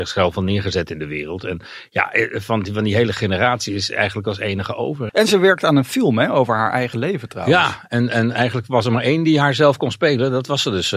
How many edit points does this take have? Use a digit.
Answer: 1